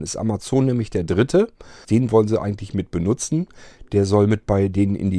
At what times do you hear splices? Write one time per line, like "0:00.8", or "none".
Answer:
0:01.8